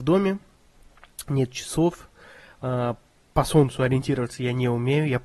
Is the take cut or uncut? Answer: uncut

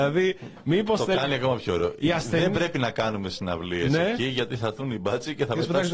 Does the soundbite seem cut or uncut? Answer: uncut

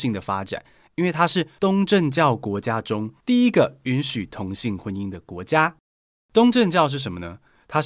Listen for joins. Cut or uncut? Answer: uncut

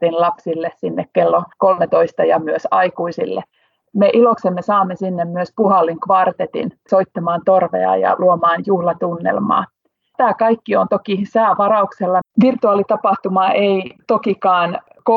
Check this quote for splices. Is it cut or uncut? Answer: cut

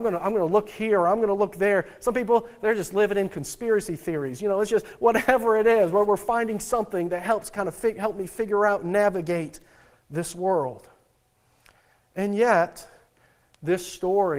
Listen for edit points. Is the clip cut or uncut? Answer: uncut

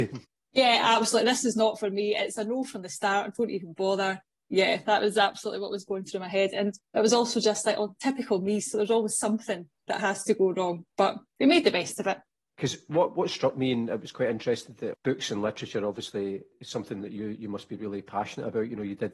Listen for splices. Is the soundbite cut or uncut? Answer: uncut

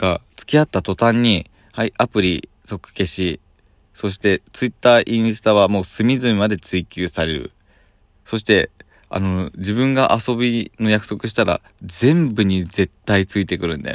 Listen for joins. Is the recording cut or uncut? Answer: uncut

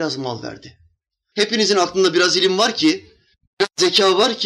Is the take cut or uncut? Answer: cut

